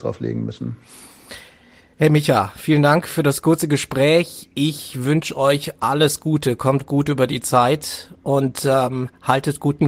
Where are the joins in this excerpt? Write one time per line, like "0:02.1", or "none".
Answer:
none